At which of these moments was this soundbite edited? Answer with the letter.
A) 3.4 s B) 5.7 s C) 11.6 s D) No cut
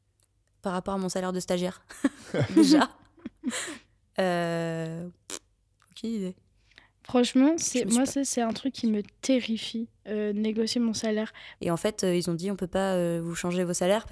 C